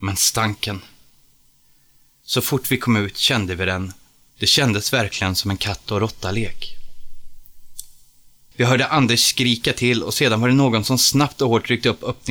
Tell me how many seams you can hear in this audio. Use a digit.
2